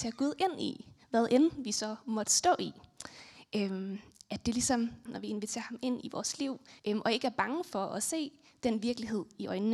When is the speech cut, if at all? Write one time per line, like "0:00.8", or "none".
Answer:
0:05.1
0:06.8